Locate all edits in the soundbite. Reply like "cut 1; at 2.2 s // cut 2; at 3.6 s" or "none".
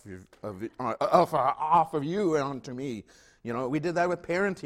none